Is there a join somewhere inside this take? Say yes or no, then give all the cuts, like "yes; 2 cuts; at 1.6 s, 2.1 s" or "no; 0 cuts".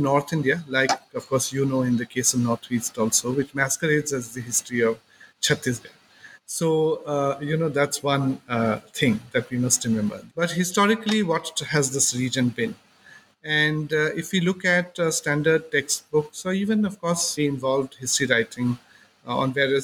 yes; 2 cuts; at 10.3 s, 17.4 s